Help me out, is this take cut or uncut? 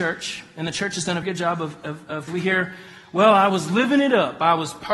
cut